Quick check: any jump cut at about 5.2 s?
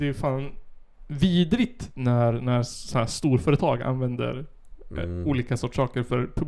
no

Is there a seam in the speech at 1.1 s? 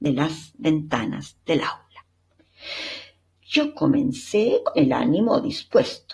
no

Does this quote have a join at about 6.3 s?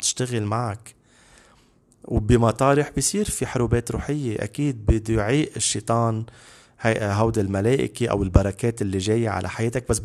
no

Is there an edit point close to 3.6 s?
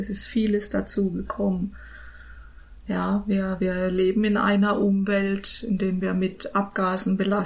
no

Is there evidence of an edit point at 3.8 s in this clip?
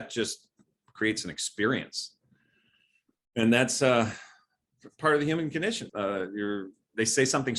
no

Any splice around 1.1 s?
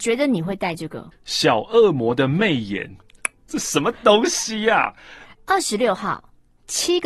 yes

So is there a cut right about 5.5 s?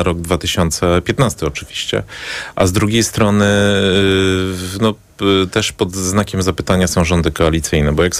no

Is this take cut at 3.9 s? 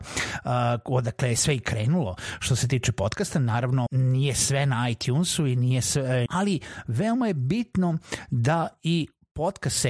yes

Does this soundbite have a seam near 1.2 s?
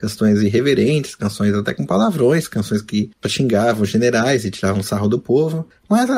no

